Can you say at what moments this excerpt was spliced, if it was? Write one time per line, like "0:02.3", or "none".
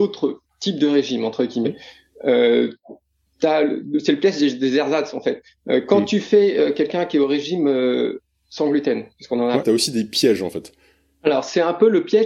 0:09.6

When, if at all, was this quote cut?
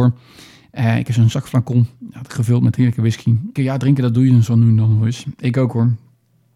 0:03.6

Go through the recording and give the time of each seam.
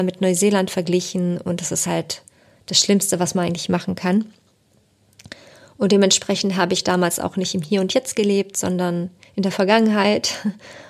none

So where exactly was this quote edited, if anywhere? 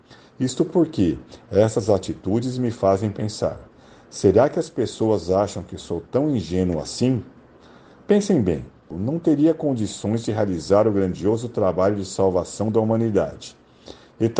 0:08.9

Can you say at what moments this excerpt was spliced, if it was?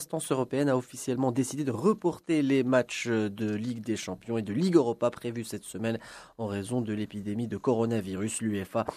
none

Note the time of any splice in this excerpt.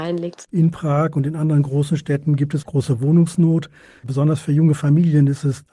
0:02.6
0:04.0

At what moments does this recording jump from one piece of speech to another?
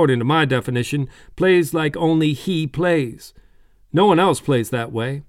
none

